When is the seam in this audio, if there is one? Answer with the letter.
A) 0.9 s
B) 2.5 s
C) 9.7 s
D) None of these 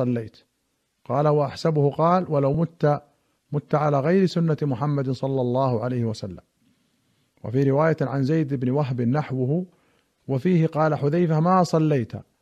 D